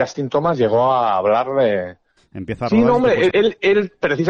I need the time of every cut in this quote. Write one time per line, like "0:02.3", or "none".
0:02.2
0:03.3